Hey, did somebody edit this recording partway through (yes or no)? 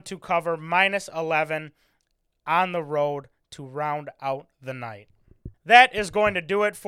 no